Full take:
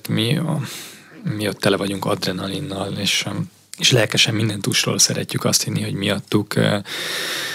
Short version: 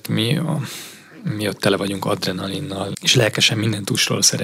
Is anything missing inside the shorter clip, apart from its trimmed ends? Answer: yes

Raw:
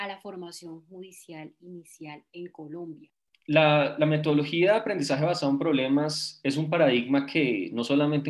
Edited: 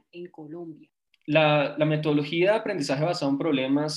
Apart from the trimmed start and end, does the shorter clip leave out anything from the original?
no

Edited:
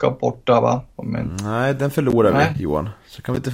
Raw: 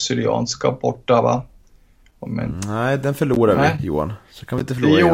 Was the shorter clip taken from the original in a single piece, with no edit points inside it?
no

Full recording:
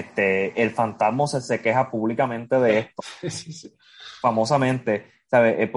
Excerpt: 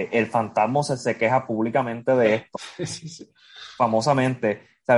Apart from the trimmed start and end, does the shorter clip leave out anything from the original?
no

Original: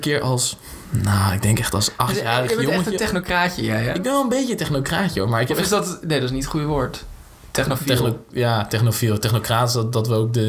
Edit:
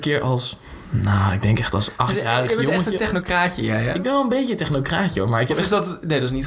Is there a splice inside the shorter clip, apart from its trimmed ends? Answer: no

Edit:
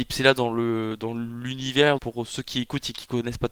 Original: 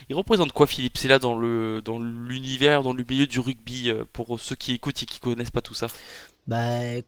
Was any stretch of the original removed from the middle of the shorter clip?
yes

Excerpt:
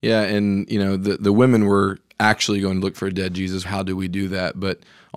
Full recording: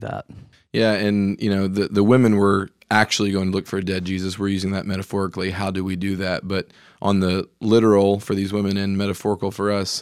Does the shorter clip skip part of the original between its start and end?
yes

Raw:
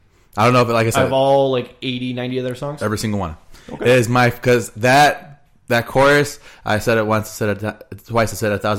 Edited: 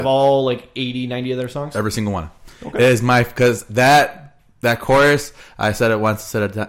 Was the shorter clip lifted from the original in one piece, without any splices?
yes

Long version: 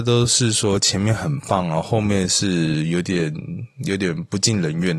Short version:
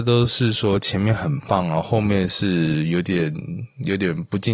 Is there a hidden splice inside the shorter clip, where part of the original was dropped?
no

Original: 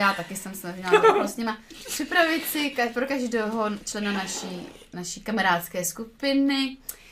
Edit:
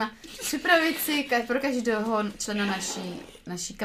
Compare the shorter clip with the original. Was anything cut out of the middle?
no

